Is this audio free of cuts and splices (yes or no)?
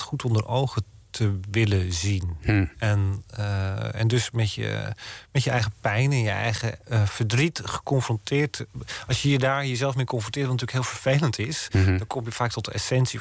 yes